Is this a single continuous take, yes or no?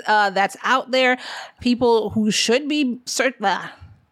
no